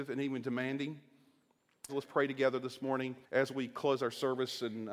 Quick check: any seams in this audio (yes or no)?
yes